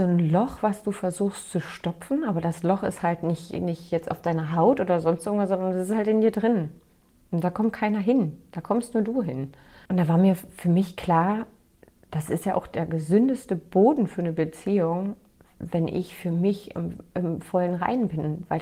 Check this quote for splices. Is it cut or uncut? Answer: uncut